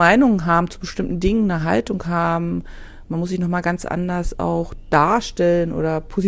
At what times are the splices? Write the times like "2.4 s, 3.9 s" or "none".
none